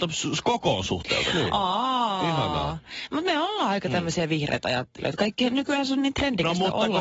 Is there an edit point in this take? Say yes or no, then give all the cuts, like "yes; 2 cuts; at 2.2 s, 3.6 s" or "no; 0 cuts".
no; 0 cuts